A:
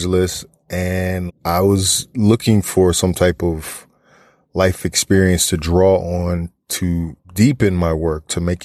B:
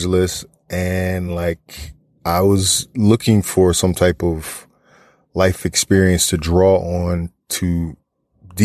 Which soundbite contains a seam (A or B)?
A